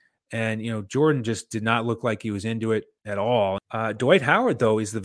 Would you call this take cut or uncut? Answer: cut